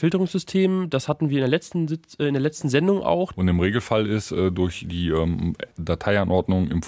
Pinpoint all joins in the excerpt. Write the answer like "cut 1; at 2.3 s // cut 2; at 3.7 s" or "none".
cut 1; at 3.3 s // cut 2; at 5.7 s